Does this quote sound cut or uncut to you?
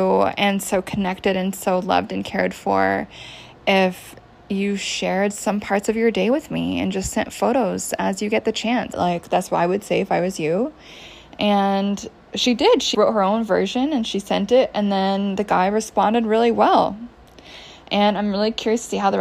cut